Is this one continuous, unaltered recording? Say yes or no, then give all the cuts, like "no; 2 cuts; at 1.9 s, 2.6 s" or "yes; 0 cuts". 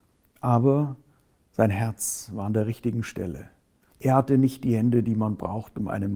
no; 1 cut; at 3.9 s